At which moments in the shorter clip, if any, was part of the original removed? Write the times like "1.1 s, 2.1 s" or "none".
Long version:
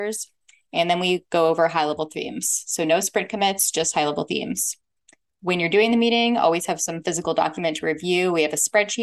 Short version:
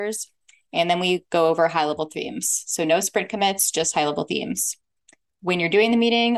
none